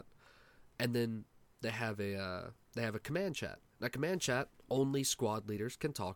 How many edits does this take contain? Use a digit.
0